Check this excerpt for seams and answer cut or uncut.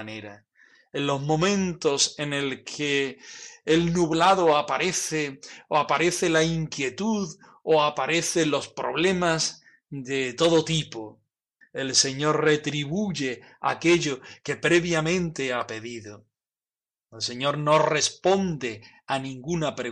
cut